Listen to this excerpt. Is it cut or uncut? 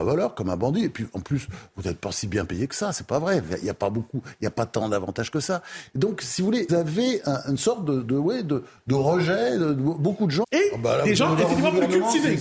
cut